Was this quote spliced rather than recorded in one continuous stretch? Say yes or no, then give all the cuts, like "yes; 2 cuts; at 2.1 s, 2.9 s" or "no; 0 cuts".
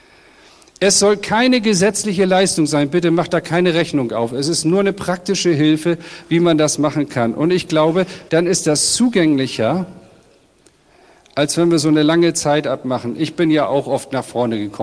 yes; 1 cut; at 8.3 s